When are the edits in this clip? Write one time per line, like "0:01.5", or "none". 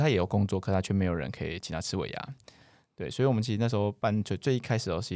none

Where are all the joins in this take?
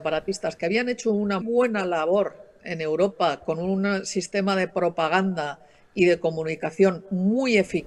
0:01.4

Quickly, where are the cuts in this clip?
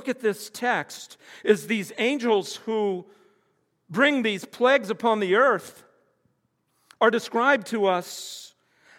none

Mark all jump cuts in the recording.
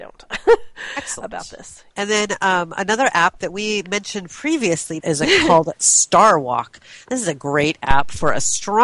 0:01.9
0:05.0

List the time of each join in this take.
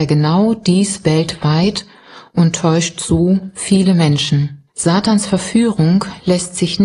0:04.7

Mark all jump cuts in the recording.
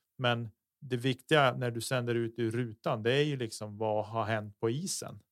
none

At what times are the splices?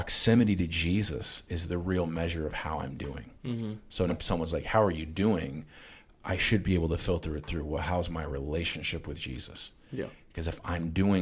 0:04.1

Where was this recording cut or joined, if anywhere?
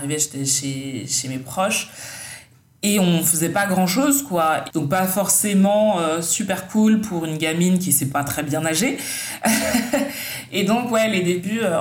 0:04.7

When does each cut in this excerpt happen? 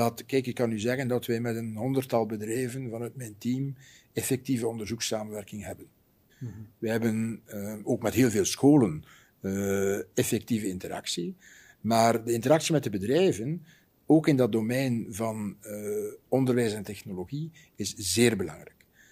0:06.3

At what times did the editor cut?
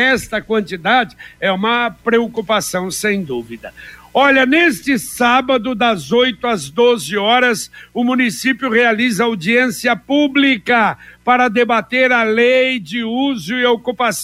none

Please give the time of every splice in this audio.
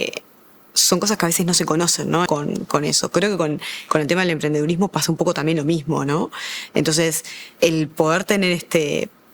0:02.3

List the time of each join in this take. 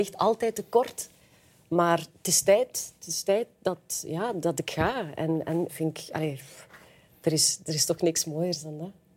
0:05.7

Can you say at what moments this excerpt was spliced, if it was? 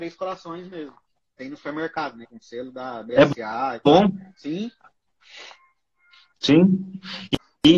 0:02.2

